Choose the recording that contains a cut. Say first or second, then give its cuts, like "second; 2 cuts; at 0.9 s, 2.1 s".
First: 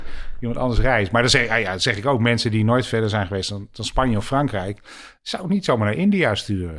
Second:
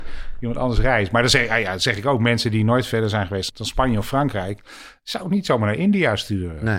second; 1 cut; at 3.5 s